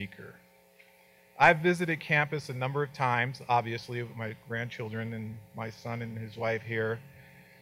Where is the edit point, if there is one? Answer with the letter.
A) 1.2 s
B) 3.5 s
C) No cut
A